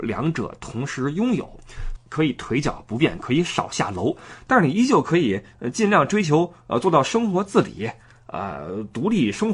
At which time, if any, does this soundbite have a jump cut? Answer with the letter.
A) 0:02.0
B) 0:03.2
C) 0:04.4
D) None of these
A